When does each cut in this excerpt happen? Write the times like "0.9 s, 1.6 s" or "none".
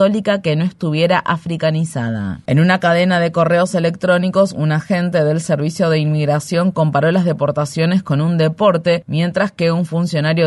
2.5 s